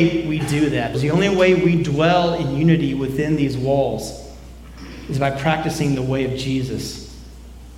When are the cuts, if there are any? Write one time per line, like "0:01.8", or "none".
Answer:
0:00.9